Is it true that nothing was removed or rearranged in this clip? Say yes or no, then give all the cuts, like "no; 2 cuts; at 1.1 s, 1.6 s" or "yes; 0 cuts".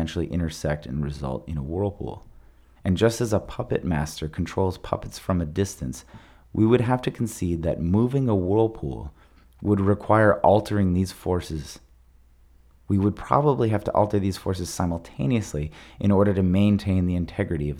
no; 1 cut; at 2.8 s